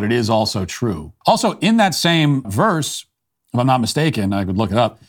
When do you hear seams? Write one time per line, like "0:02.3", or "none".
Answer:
0:01.2
0:02.4

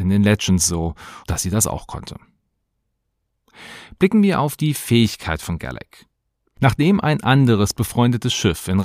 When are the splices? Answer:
0:01.2

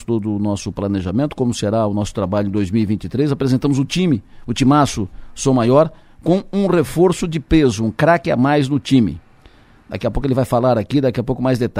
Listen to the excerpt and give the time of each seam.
none

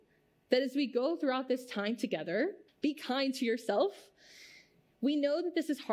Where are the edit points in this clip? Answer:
0:02.7

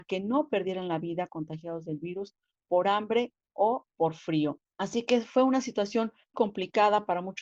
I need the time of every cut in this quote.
0:04.7
0:06.3

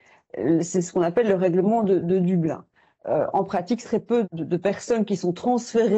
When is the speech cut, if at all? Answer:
0:03.8

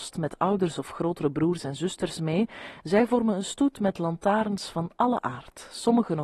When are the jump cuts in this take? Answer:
none

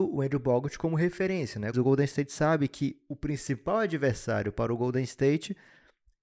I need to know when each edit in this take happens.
0:01.7

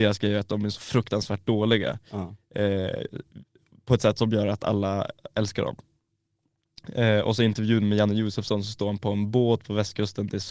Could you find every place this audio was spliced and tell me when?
none

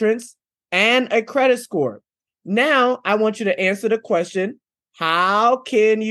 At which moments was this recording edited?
none

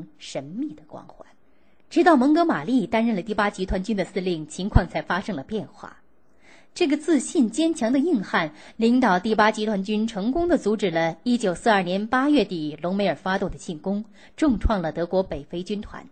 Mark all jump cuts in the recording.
none

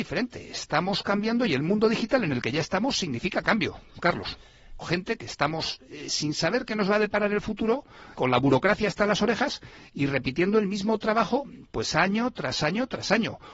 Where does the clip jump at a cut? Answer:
0:04.8
0:08.2

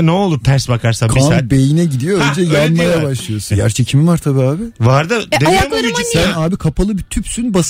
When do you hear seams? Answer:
0:03.5

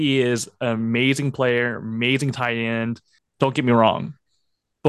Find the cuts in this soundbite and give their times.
0:03.2

